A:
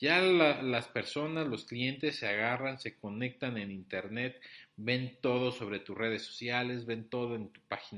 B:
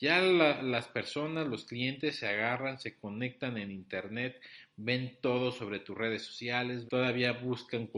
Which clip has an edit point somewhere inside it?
B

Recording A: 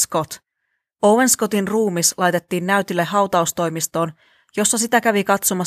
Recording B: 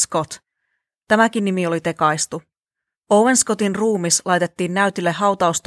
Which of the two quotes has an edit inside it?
A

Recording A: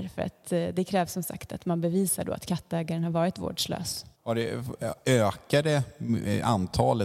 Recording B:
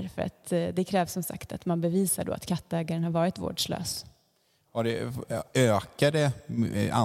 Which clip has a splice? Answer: A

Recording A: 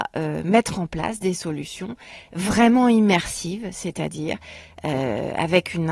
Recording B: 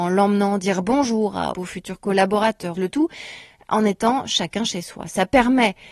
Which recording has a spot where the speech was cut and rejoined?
B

